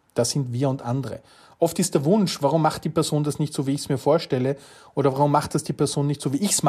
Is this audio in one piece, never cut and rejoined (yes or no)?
yes